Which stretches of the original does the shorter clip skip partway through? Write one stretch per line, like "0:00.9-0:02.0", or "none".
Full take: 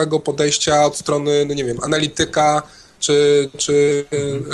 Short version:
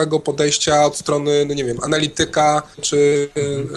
0:02.7-0:03.5